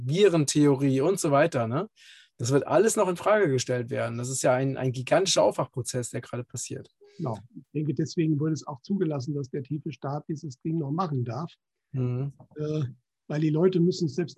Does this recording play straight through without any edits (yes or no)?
yes